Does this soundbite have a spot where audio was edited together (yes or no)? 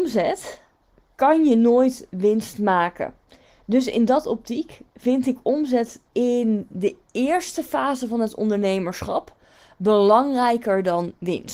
yes